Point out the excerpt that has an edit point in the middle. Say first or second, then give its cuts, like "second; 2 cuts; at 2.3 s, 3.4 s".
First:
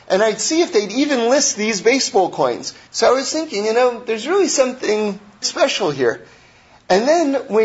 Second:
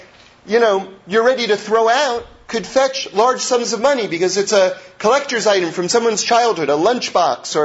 first; 2 cuts; at 2.9 s, 5.4 s